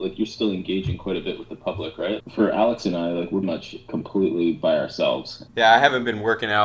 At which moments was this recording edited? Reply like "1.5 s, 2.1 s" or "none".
2.2 s, 3.4 s, 5.5 s